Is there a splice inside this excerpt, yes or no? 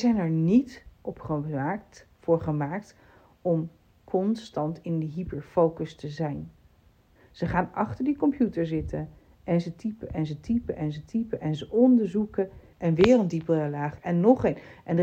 yes